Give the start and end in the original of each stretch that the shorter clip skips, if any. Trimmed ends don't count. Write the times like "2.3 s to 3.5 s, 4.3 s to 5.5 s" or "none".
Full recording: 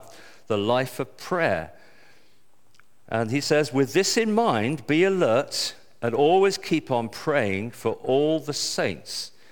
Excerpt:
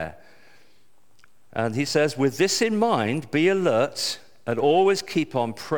none